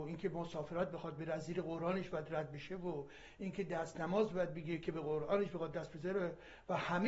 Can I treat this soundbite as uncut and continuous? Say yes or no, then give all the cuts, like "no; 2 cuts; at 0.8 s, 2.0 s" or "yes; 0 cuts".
yes; 0 cuts